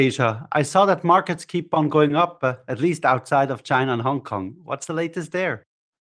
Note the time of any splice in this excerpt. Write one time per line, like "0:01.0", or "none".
none